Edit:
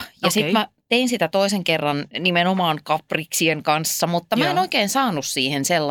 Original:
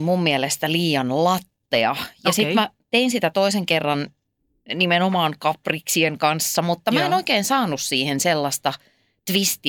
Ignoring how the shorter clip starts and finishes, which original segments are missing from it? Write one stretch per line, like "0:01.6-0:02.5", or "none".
0:04.1-0:04.7